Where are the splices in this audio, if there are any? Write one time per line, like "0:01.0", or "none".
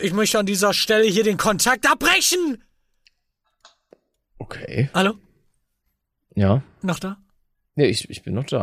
none